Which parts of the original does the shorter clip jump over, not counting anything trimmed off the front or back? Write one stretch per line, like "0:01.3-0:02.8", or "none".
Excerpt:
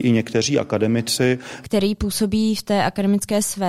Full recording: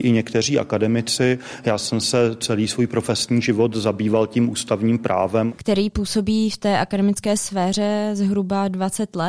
0:01.6-0:05.6